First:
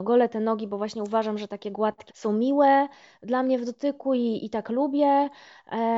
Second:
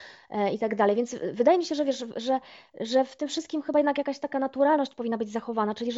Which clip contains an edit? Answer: first; 1 cut; at 2.1 s

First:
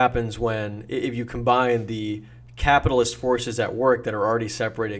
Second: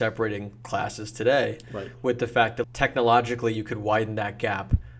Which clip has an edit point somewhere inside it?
second; 1 cut; at 2.6 s

